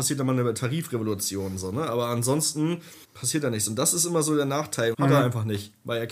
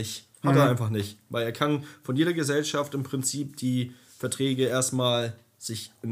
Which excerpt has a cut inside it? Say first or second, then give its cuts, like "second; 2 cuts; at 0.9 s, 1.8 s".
first; 2 cuts; at 3.0 s, 4.9 s